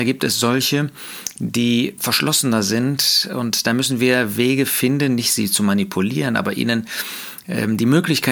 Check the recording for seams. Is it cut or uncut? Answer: cut